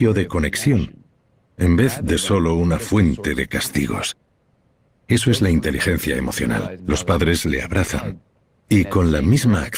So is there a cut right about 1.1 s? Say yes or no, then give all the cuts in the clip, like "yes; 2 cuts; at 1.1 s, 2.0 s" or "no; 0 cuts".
no; 2 cuts; at 4.9 s, 6.8 s